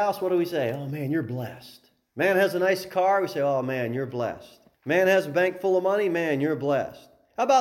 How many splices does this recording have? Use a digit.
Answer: 1